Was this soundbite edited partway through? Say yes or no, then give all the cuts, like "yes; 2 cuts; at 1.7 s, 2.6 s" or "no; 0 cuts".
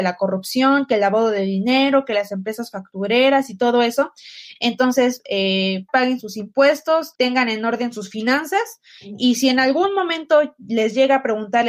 yes; 3 cuts; at 4.6 s, 5.9 s, 7.1 s